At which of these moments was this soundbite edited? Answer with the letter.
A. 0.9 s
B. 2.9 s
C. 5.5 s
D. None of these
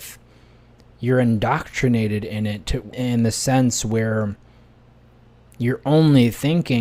B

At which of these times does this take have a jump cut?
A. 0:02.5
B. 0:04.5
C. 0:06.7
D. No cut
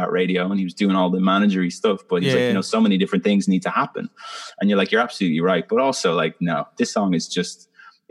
D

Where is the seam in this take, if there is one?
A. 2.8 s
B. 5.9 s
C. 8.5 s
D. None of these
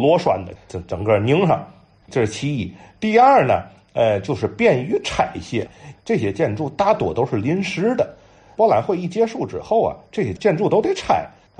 B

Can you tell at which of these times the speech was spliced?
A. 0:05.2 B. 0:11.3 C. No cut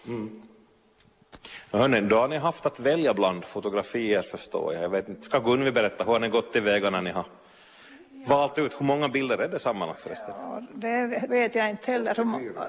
B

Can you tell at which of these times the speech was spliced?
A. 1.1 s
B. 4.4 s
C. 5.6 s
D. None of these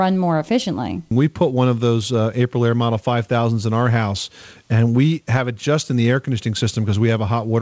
A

